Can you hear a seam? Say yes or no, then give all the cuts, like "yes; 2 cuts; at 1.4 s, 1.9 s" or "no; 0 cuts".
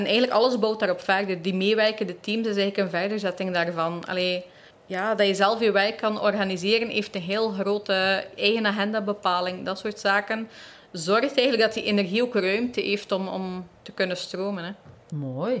yes; 1 cut; at 4.7 s